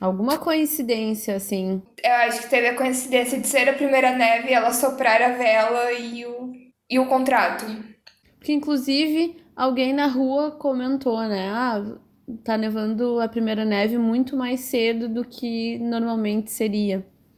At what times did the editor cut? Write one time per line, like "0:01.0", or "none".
none